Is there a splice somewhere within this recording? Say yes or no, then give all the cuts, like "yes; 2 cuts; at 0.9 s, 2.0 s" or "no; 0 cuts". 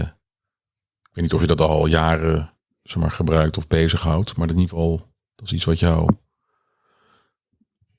no; 0 cuts